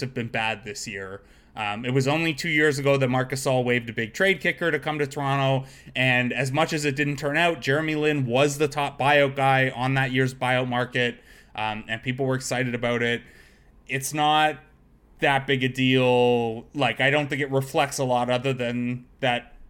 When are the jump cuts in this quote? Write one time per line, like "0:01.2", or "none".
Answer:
none